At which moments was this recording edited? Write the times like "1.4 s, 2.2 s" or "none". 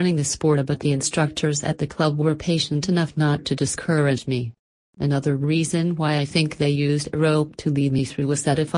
4.8 s